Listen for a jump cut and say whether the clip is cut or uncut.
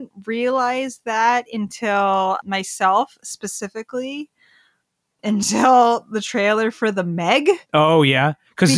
cut